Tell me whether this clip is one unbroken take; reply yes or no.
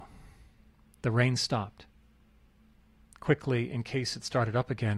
no